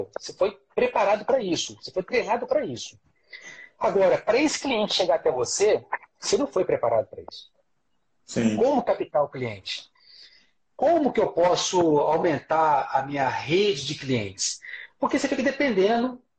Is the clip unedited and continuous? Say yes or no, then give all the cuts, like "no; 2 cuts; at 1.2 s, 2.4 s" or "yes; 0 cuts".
yes; 0 cuts